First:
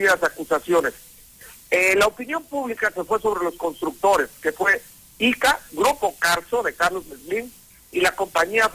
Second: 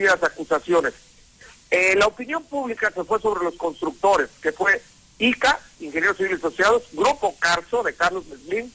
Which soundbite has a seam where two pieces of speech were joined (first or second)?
first